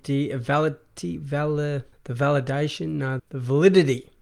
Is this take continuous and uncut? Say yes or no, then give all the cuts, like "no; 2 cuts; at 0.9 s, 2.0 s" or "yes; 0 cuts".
no; 2 cuts; at 1.9 s, 3.2 s